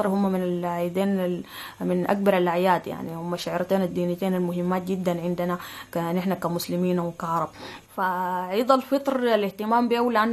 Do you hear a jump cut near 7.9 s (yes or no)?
yes